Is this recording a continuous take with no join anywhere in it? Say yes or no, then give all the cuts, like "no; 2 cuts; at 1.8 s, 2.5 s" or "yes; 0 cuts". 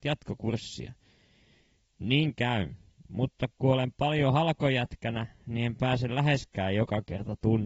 yes; 0 cuts